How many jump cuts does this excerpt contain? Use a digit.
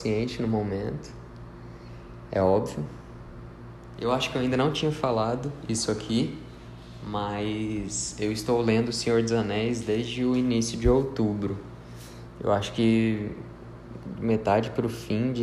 1